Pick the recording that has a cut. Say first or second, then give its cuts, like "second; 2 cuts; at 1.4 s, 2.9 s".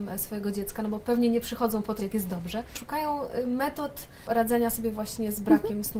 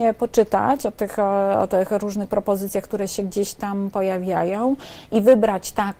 first; 1 cut; at 2.0 s